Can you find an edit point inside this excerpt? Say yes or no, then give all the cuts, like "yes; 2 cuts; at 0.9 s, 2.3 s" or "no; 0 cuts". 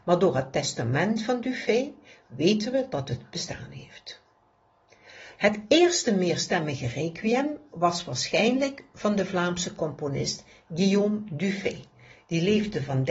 yes; 1 cut; at 5.4 s